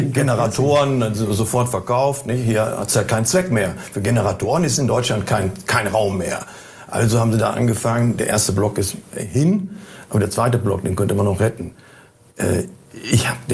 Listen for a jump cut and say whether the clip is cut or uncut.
uncut